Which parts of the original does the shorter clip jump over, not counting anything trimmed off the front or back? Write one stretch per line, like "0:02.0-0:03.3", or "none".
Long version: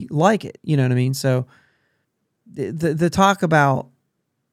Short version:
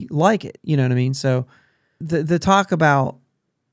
0:02.0-0:02.7